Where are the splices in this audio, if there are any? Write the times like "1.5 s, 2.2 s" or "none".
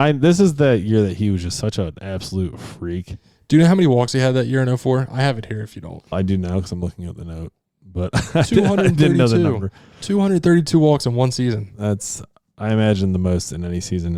6.1 s